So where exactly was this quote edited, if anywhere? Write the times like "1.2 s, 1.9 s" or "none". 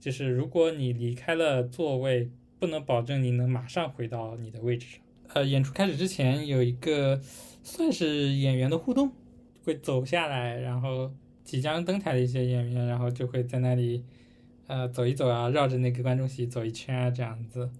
none